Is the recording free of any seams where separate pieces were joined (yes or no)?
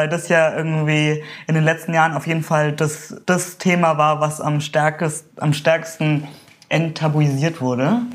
no